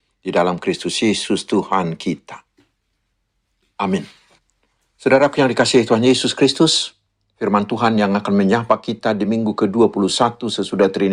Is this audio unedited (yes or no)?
yes